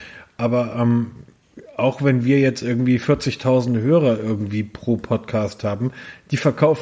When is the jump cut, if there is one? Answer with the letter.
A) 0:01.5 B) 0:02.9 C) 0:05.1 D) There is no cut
D